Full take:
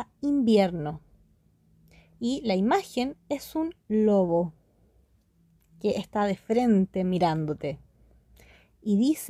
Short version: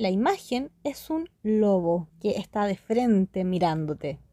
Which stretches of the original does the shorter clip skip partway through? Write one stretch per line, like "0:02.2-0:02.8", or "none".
0:04.5-0:05.7